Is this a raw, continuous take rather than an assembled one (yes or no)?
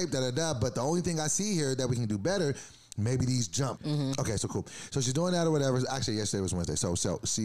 no